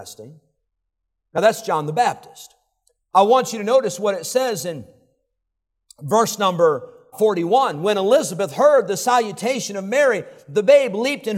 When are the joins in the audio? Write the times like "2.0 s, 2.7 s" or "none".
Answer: 7.1 s